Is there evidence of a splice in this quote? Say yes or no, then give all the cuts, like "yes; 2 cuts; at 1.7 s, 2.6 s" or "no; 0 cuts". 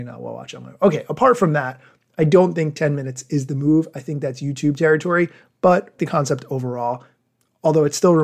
yes; 1 cut; at 6.0 s